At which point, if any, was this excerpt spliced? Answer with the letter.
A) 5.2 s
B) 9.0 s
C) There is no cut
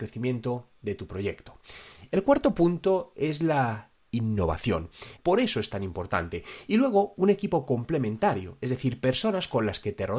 A